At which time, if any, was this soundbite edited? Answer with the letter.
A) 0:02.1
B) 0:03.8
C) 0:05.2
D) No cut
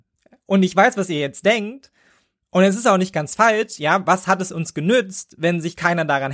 D